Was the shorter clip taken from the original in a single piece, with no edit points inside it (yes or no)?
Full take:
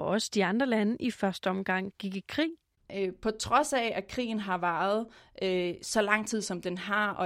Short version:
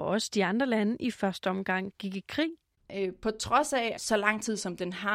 no